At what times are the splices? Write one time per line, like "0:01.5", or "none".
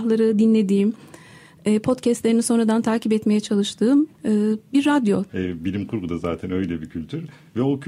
0:04.1
0:05.3